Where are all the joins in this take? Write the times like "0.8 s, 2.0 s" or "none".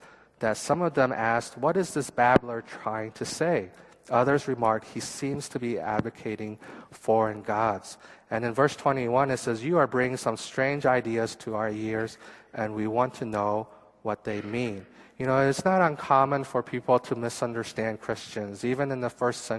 none